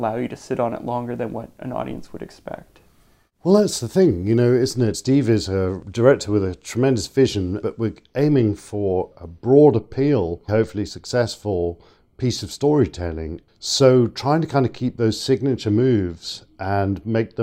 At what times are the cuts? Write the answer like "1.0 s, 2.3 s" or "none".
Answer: 10.5 s